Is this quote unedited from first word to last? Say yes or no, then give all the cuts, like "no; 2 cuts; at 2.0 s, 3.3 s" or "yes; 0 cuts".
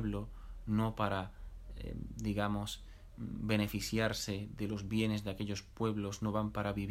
yes; 0 cuts